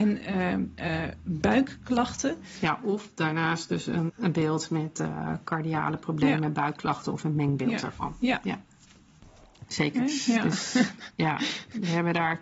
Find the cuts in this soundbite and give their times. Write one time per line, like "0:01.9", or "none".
0:04.1
0:09.7